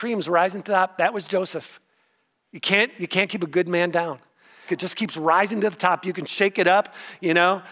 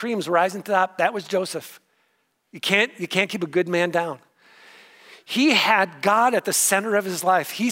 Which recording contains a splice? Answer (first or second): first